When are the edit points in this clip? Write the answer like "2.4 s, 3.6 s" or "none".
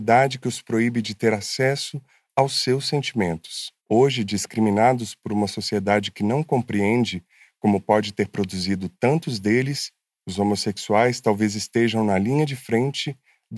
3.8 s